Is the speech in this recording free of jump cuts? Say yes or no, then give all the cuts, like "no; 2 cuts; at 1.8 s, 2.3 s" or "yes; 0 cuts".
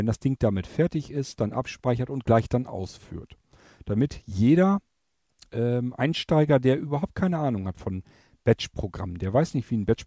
yes; 0 cuts